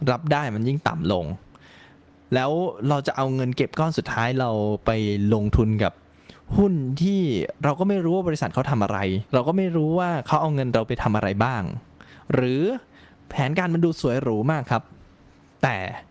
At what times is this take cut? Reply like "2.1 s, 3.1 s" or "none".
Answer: 9.3 s